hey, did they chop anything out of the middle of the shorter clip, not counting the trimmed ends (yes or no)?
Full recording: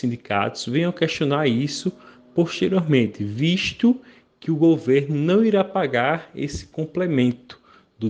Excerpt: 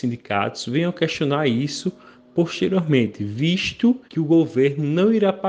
yes